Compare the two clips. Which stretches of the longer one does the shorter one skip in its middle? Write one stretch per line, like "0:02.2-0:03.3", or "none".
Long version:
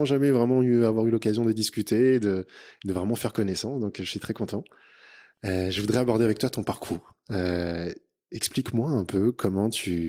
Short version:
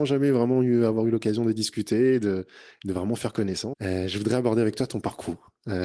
0:03.7-0:05.4